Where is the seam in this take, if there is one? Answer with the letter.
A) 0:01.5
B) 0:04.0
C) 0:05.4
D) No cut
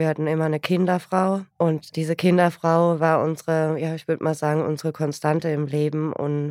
A